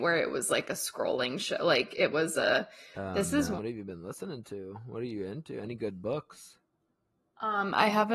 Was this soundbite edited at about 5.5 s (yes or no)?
no